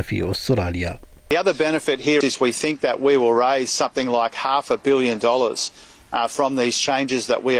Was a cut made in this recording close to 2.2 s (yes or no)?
yes